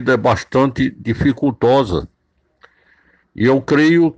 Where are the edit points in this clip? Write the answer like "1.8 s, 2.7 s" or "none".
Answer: 3.2 s